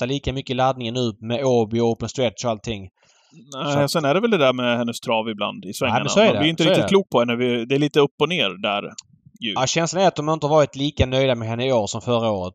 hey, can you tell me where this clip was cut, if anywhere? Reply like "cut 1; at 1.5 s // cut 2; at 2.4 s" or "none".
none